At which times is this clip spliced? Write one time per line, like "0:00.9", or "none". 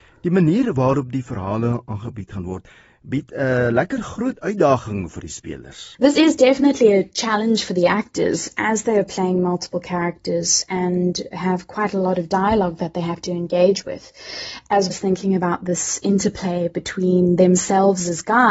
0:05.9
0:14.9